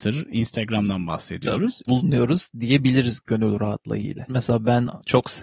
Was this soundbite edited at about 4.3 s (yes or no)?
yes